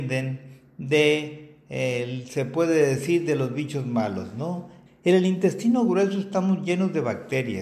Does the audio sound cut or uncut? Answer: cut